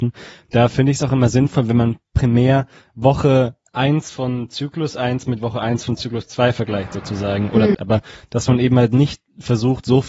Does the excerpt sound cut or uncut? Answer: cut